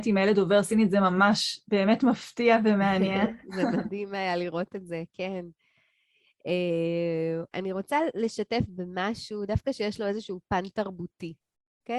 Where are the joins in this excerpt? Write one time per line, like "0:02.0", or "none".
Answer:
0:07.5

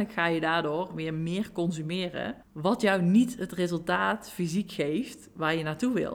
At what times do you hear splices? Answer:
0:02.4

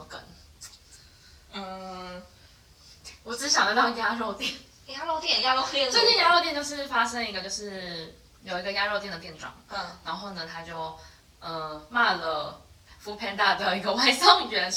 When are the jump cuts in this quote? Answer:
none

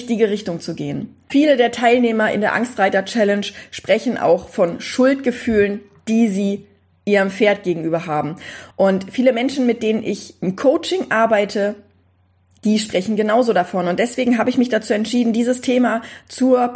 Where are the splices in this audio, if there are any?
none

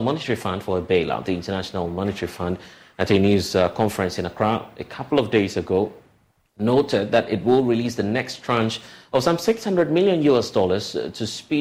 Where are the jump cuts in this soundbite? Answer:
none

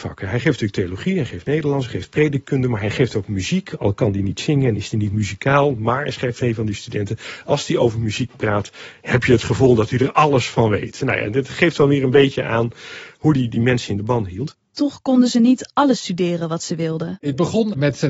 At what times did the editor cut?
none

